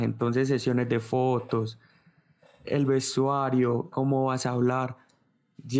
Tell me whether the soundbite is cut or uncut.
cut